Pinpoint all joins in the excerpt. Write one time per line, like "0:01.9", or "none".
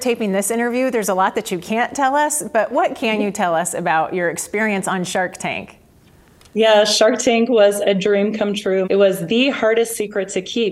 0:08.8